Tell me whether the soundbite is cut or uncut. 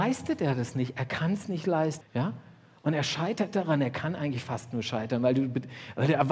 cut